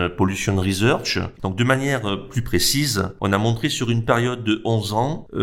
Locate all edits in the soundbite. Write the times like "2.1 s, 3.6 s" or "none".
1.4 s